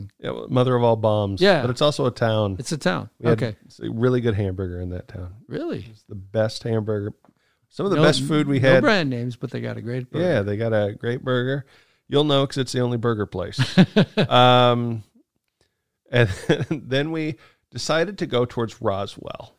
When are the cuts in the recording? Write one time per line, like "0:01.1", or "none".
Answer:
none